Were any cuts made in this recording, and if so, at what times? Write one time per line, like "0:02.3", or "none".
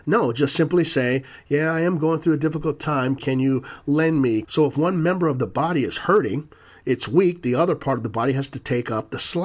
0:03.2
0:04.4